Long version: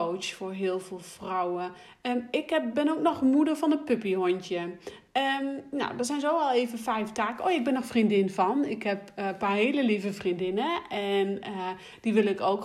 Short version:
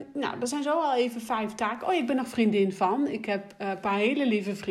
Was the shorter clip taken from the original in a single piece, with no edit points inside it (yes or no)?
yes